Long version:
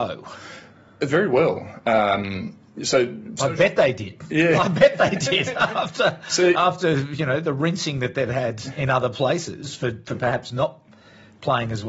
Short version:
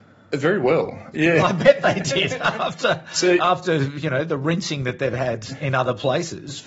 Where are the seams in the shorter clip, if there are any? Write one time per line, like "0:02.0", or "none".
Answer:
0:01.1